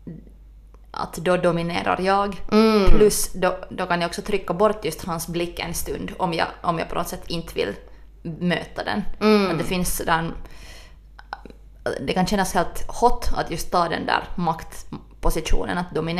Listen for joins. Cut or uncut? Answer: uncut